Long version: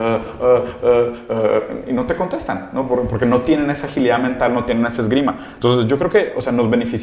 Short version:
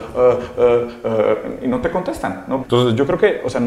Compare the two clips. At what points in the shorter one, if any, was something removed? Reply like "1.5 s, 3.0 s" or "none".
2.6 s